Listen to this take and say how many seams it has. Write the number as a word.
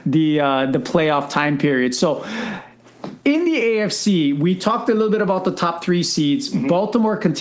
one